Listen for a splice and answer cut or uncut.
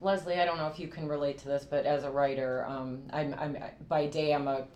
uncut